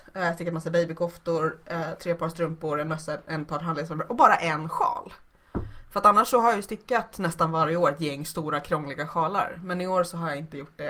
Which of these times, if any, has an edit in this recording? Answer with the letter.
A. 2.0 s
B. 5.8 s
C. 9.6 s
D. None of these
D